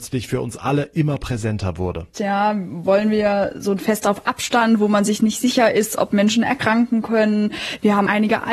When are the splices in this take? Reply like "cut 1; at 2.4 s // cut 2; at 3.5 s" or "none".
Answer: cut 1; at 2.1 s